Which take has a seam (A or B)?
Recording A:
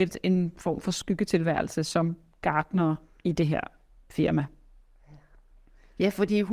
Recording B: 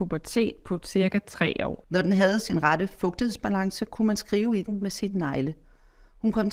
B